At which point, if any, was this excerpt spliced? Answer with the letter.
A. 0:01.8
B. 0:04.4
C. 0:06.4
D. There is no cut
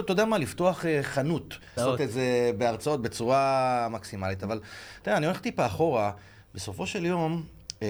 A